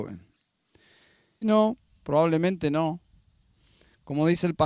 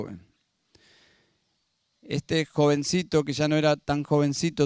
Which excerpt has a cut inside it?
first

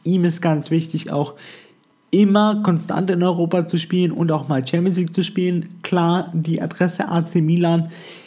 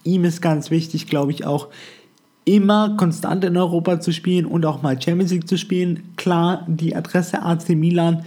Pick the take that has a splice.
first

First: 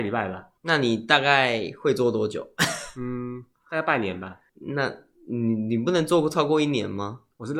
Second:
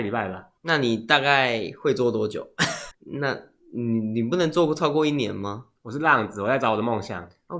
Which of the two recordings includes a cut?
second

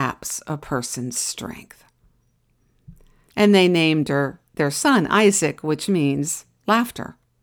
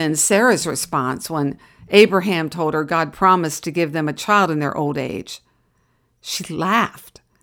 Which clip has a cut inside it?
first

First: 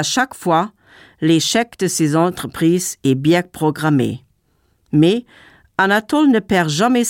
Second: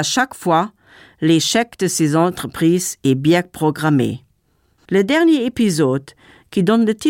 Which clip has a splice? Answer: second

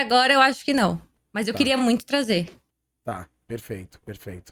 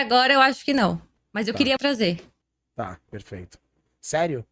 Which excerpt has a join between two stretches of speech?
second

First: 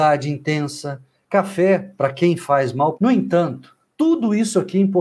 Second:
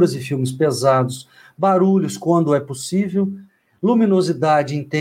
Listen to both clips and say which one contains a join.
first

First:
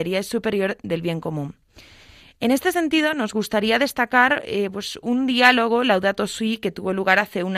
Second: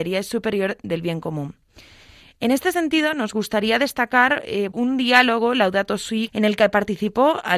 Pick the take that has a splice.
second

